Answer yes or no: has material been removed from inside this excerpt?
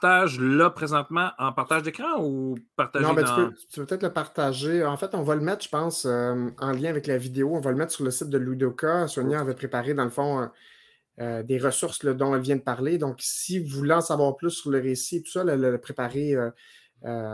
no